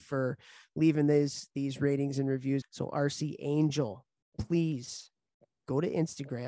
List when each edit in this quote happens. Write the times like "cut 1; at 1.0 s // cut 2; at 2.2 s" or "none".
cut 1; at 2.6 s